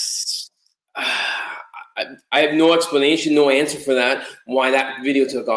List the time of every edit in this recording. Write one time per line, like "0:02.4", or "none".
none